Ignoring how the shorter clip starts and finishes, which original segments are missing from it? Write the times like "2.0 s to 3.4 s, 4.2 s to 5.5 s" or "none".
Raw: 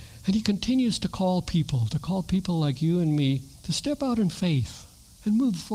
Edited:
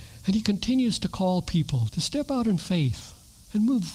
1.9 s to 3.6 s